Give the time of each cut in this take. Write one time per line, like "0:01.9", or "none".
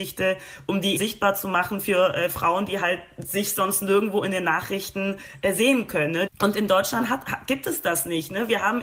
0:01.0
0:06.3